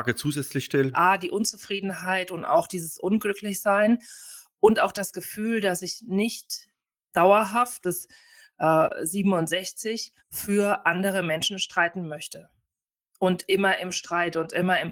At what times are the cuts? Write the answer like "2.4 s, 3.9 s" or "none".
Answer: 0.9 s, 7.8 s, 10.2 s